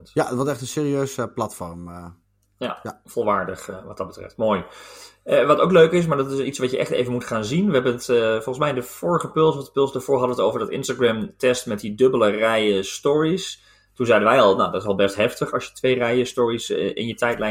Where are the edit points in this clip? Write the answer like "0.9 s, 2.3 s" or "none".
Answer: none